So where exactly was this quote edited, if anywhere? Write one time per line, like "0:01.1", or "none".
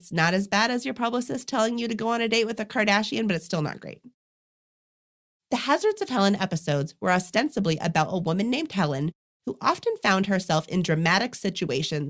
none